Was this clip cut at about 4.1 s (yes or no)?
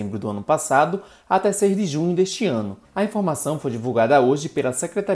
no